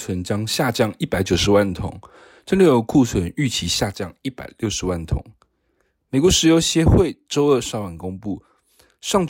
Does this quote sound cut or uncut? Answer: uncut